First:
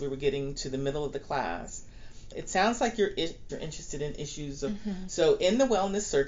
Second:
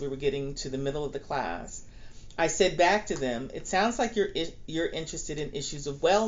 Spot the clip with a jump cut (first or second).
first